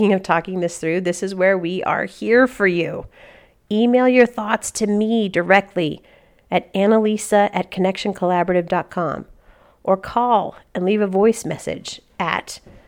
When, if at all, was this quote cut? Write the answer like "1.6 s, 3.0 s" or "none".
none